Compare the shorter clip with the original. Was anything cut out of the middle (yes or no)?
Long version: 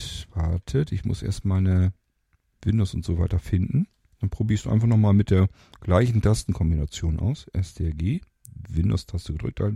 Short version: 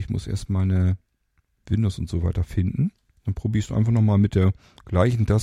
no